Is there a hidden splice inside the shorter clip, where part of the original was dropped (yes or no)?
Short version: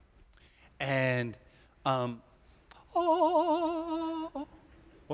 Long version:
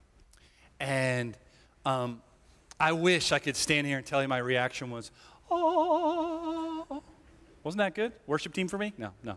yes